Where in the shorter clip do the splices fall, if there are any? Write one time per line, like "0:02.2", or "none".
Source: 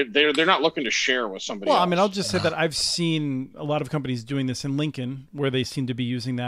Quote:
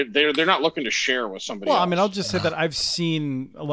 none